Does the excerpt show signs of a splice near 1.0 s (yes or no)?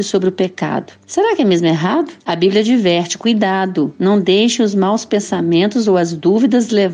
no